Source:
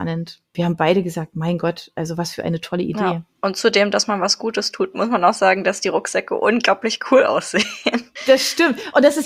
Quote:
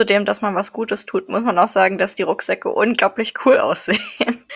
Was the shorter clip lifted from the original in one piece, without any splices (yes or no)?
yes